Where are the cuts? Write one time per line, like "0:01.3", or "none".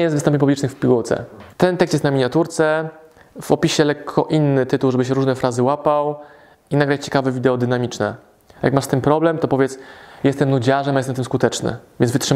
0:01.5